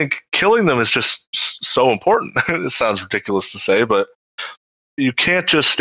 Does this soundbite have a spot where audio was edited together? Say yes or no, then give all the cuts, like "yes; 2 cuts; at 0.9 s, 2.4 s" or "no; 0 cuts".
no; 0 cuts